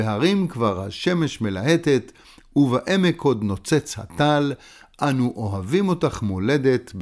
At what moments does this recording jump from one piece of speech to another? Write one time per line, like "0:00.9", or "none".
none

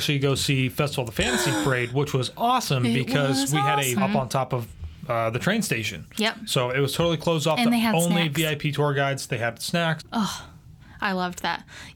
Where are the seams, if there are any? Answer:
0:04.0
0:10.0

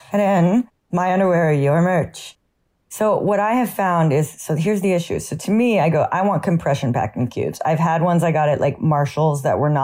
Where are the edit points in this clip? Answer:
none

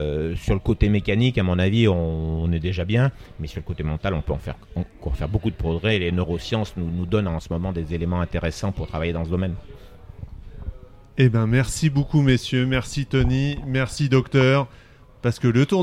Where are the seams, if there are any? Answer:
none

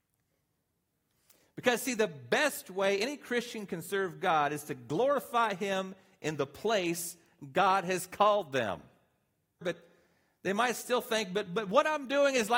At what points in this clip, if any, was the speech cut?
0:09.6

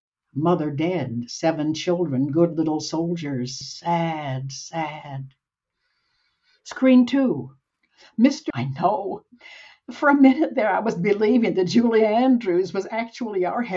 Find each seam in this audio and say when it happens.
0:03.6
0:08.5

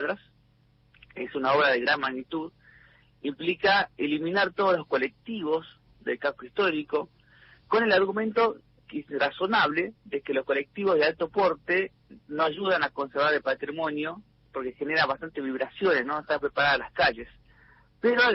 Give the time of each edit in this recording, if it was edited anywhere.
none

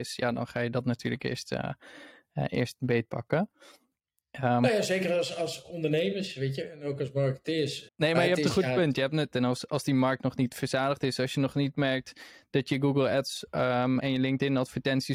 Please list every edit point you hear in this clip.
0:07.9
0:09.3
0:14.0

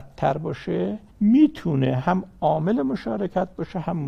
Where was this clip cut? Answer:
0:01.1

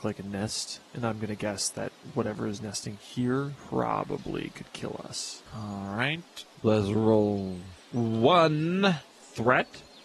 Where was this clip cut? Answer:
0:05.5

